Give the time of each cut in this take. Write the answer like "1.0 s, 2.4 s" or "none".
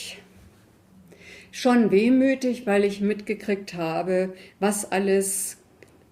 none